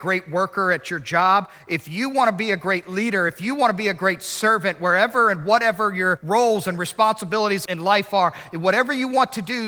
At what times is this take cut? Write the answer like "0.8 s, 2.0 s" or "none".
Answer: none